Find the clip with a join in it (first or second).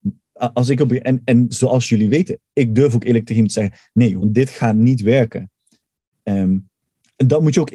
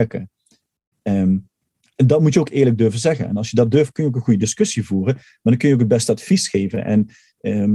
first